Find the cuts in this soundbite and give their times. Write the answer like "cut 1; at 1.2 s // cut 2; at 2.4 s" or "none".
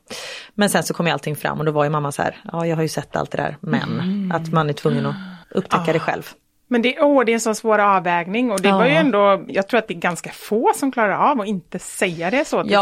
cut 1; at 5.4 s // cut 2; at 9.5 s